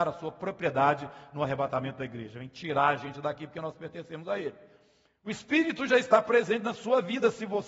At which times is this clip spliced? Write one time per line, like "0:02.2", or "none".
none